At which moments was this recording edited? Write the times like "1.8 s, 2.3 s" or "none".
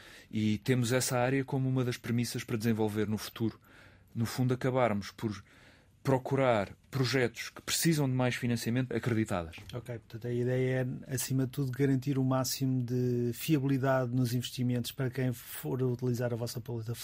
8.9 s